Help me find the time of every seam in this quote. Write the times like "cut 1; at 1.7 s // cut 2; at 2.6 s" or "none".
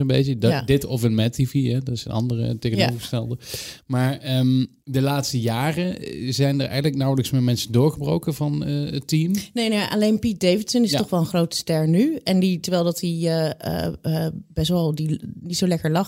cut 1; at 4.8 s